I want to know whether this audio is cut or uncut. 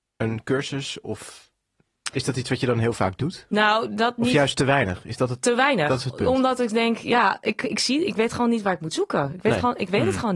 uncut